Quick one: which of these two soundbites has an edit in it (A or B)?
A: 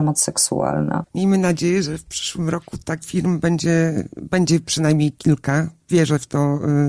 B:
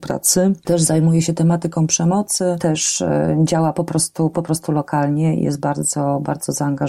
A